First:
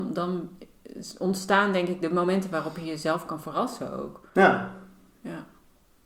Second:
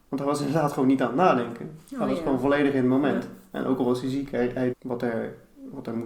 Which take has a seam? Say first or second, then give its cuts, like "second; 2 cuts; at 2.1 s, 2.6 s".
second; 1 cut; at 4.7 s